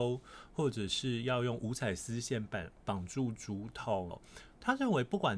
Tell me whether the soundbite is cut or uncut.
cut